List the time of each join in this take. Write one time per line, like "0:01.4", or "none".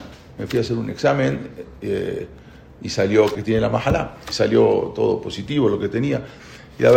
0:03.4